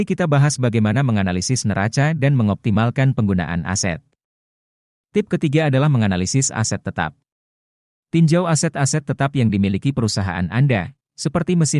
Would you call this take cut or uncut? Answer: uncut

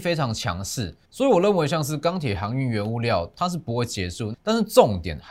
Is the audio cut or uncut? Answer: cut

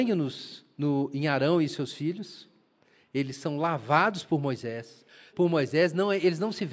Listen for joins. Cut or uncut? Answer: cut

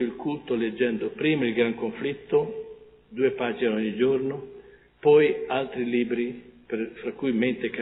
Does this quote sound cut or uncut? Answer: uncut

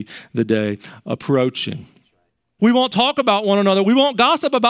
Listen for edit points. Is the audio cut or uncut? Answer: cut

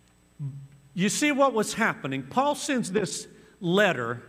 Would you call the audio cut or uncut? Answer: uncut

